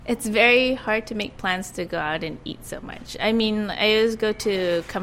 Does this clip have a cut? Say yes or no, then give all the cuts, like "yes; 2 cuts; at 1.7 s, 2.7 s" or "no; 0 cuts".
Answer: no; 0 cuts